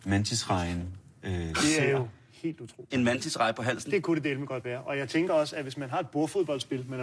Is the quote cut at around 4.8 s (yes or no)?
no